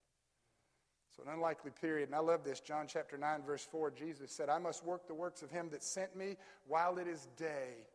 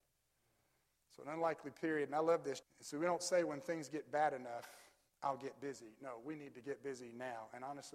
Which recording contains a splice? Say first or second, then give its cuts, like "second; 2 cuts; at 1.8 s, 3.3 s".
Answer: second; 1 cut; at 2.6 s